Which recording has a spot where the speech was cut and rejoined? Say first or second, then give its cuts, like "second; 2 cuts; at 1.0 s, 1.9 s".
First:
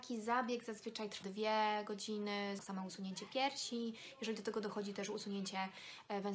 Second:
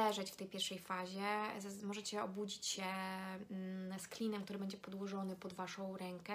first; 2 cuts; at 1.2 s, 2.6 s